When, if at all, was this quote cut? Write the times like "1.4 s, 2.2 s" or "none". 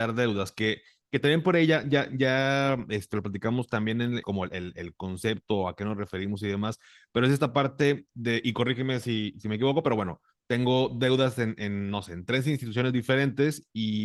4.2 s